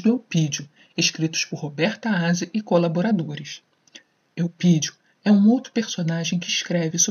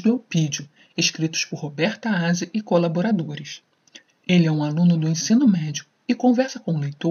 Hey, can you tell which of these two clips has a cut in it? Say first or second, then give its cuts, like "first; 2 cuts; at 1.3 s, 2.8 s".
second; 1 cut; at 4.1 s